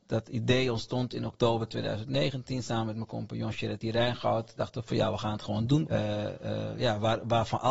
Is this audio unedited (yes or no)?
no